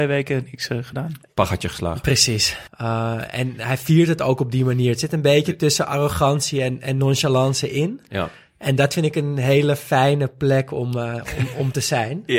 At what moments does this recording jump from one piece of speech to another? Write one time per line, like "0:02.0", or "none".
0:02.7